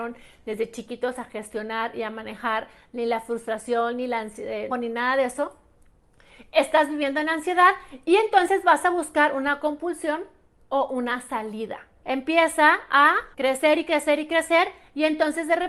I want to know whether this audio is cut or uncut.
cut